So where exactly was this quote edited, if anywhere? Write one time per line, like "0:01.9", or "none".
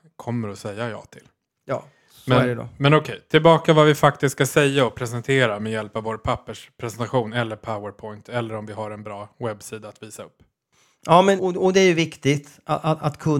0:11.4